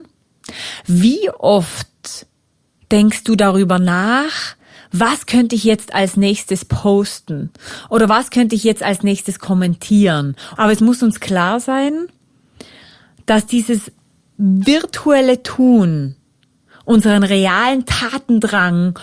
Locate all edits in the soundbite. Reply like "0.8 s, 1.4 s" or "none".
10.6 s